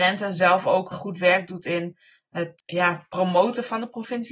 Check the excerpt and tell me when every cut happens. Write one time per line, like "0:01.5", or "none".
0:00.9